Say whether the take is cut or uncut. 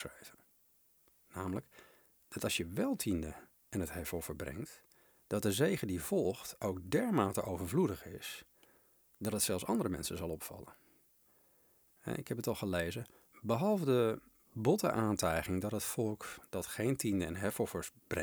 cut